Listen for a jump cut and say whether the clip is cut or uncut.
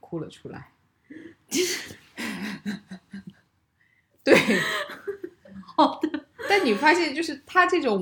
uncut